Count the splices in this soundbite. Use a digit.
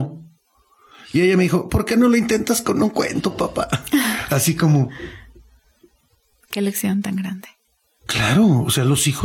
0